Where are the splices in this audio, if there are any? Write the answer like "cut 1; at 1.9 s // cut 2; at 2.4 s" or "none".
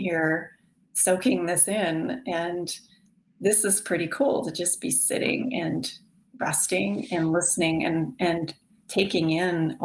none